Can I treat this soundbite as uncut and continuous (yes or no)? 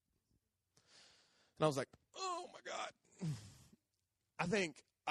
yes